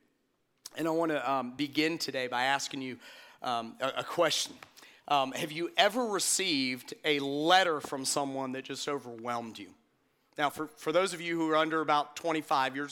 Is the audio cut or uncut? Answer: uncut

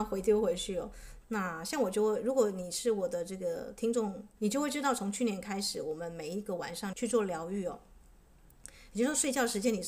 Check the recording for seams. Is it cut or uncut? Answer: cut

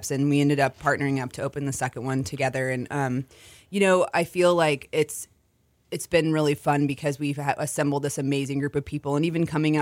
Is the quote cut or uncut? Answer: uncut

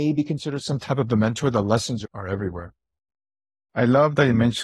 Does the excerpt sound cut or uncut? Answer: uncut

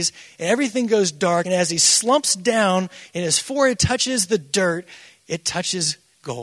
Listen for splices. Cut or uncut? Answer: uncut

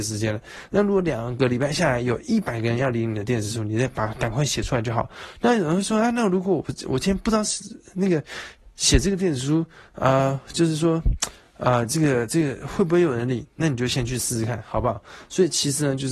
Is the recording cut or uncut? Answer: uncut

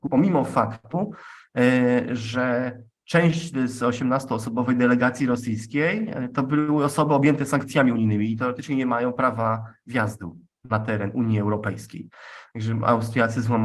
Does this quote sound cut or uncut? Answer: uncut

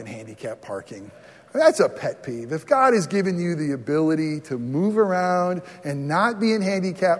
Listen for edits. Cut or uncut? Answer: uncut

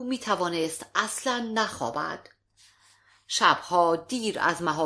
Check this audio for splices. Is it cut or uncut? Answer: uncut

